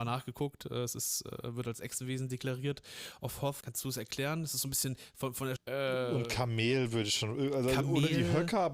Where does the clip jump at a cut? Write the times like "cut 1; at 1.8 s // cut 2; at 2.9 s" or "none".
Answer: cut 1; at 3.6 s // cut 2; at 5.6 s

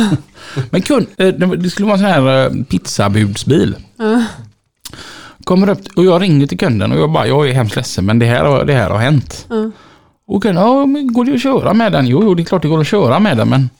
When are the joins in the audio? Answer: cut 1; at 1.1 s

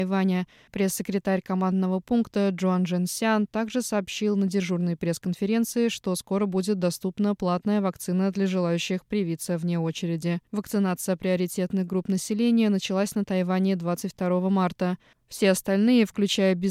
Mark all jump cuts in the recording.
cut 1; at 10.5 s // cut 2; at 15.2 s

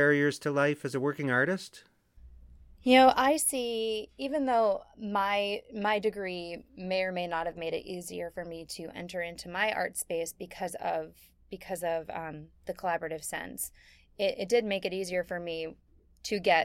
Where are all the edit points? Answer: none

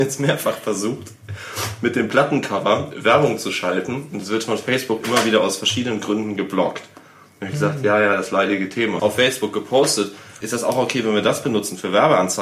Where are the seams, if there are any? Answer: cut 1; at 9.0 s // cut 2; at 10.4 s

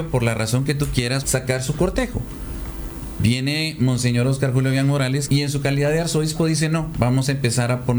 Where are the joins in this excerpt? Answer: cut 1; at 1.2 s // cut 2; at 5.3 s

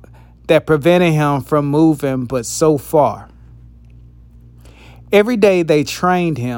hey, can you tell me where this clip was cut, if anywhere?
none

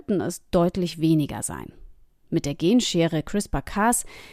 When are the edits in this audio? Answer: none

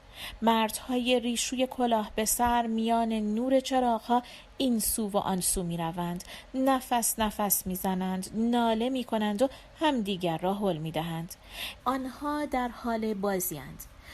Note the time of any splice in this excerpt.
cut 1; at 11.8 s

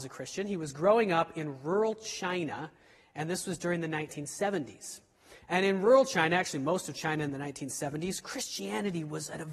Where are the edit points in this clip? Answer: none

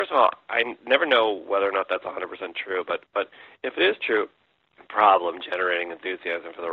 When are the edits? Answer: cut 1; at 4.7 s

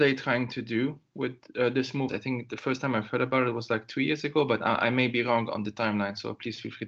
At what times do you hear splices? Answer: cut 1; at 2.1 s

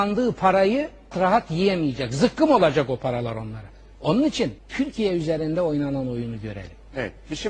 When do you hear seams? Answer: cut 1; at 1.1 s // cut 2; at 4.6 s

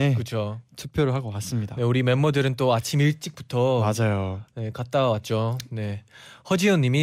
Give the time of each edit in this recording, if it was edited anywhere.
none

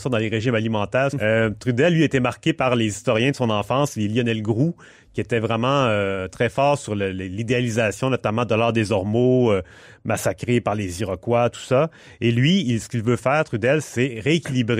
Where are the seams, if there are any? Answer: cut 1; at 1.1 s

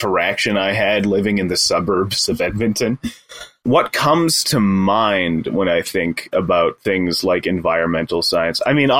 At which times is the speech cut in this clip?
none

